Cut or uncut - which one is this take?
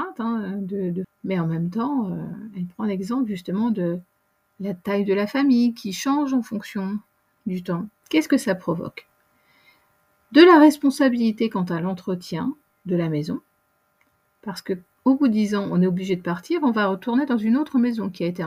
cut